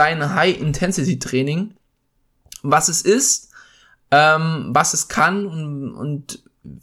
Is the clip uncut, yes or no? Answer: yes